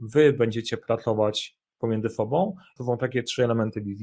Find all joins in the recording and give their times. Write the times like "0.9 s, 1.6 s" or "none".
2.8 s